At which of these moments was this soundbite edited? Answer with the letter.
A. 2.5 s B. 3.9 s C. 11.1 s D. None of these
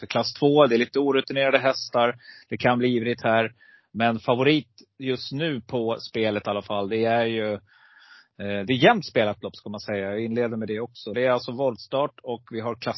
C